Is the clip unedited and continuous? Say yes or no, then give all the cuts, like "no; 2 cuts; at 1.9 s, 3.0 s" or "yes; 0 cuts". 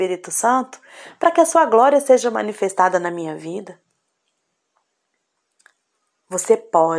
yes; 0 cuts